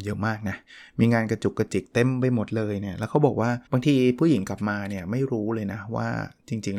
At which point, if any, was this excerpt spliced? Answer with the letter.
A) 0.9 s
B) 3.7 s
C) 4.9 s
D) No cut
B